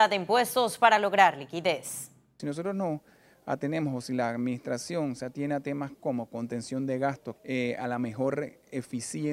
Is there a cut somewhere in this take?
yes; 2 cuts; at 2.4 s, 7.4 s

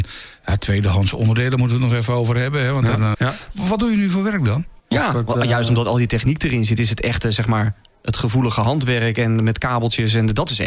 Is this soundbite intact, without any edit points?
no; 2 cuts; at 3.1 s, 4.8 s

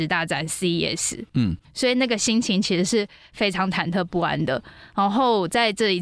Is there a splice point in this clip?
yes; 1 cut; at 1.6 s

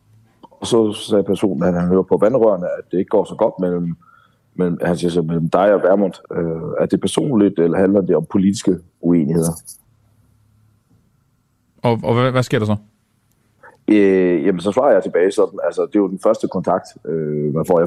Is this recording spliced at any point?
no; 0 cuts

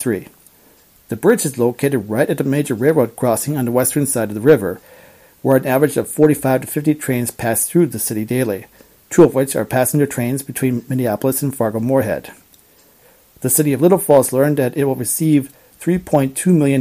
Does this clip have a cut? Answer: no; 0 cuts

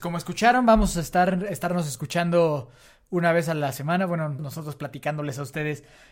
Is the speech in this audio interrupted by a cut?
yes; 1 cut; at 4.4 s

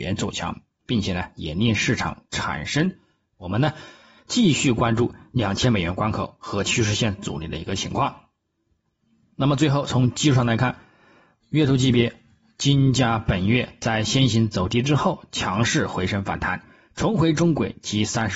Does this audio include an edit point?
yes; 1 cut; at 3.2 s

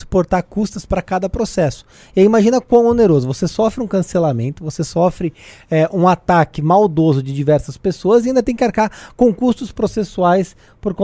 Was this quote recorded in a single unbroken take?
yes; 0 cuts

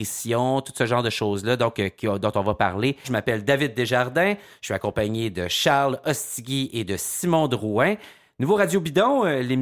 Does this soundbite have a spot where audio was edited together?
yes; 1 cut; at 3.0 s

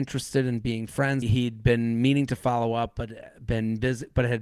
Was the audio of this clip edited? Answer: yes; 1 cut; at 1.2 s

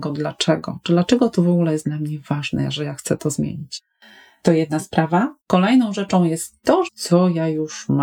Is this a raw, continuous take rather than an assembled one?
no; 2 cuts; at 5.4 s, 6.9 s

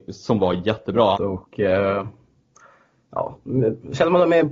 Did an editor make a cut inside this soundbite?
yes; 1 cut; at 1.1 s

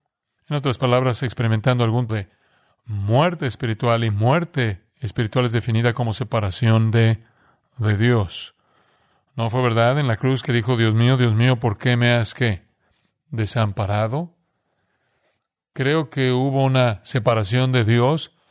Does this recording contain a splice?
yes; 1 cut; at 2.1 s

